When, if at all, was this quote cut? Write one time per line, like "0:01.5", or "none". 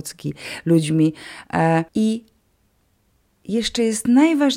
0:01.9